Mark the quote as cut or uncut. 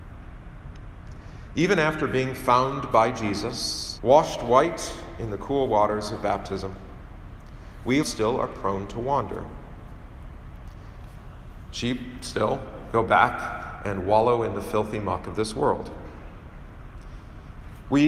cut